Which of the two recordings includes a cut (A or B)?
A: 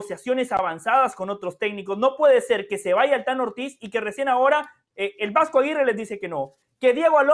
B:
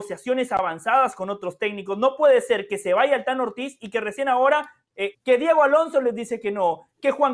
B